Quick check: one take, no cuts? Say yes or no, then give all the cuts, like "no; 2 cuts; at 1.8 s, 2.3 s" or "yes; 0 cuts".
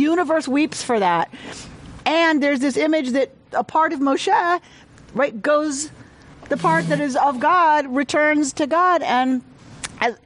yes; 0 cuts